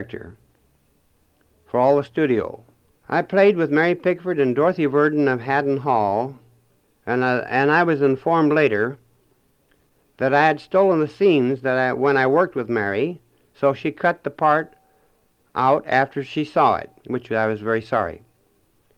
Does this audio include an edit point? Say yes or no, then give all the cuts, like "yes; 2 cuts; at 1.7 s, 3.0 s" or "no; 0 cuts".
yes; 2 cuts; at 2.9 s, 17.0 s